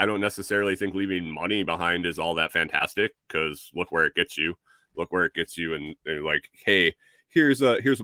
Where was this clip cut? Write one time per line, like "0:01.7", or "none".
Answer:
none